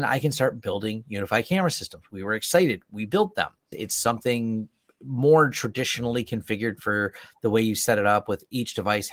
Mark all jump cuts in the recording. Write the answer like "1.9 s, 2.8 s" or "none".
3.7 s